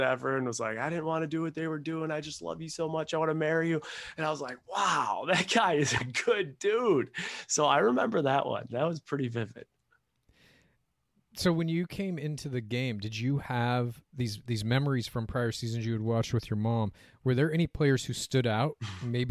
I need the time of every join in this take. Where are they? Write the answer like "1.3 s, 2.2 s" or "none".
none